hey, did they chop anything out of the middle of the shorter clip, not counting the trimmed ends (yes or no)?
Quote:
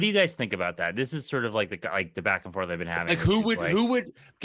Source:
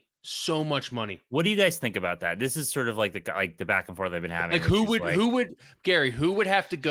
no